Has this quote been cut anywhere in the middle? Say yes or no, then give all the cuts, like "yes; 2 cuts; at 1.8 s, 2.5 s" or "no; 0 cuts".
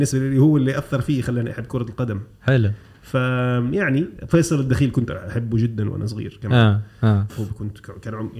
yes; 1 cut; at 7.3 s